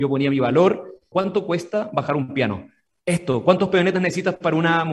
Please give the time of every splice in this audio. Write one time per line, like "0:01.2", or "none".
0:01.1